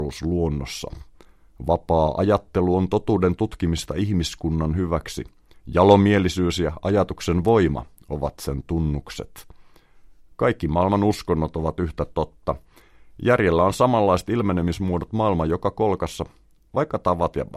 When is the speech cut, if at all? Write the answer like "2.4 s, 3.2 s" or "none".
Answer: none